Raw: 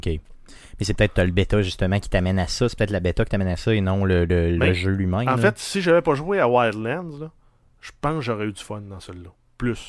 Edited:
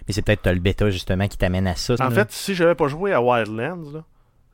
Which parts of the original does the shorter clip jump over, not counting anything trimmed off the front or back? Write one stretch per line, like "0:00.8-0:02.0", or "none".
0:02.7-0:05.3